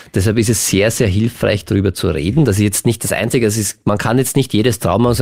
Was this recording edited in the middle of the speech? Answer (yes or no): no